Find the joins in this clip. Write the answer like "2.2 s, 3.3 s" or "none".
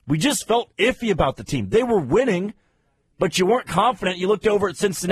none